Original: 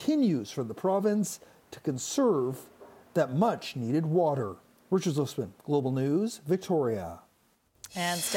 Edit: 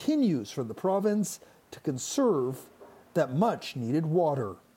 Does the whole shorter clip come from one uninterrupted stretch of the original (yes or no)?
yes